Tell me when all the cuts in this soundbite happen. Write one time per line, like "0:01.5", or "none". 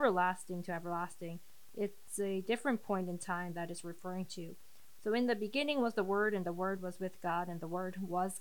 0:05.0